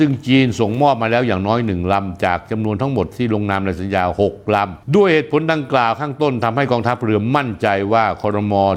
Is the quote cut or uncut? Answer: uncut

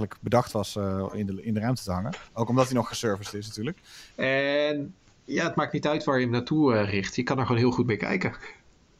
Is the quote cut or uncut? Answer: cut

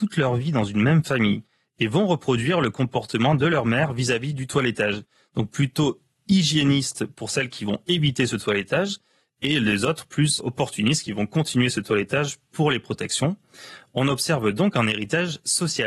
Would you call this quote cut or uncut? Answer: cut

